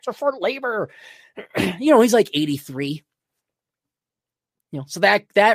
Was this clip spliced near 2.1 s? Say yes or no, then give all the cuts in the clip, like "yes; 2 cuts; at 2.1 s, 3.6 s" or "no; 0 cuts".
no; 0 cuts